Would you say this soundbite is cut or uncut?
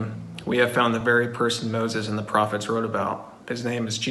uncut